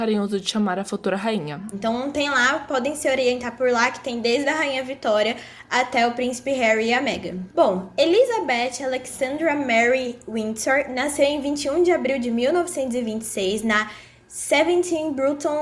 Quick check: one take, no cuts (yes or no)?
no